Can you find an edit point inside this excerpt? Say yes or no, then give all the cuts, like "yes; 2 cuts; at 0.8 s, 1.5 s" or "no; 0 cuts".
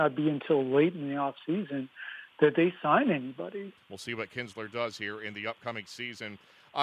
yes; 1 cut; at 3.8 s